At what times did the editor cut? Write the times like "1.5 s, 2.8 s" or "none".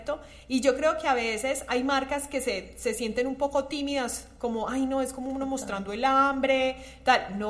none